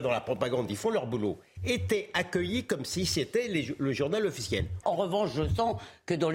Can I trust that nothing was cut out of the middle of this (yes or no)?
no